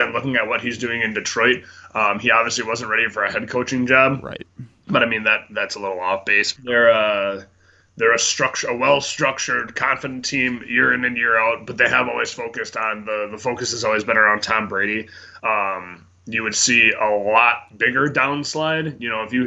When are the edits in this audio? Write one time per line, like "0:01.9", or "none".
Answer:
0:06.6
0:15.4